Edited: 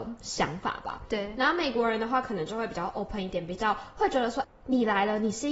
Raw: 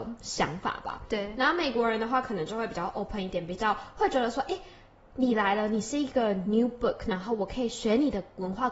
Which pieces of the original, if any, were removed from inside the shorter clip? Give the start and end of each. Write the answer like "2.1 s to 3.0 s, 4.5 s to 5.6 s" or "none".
4.4 s to 4.9 s